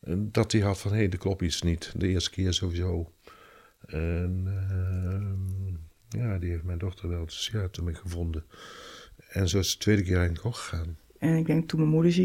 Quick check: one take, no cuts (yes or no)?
yes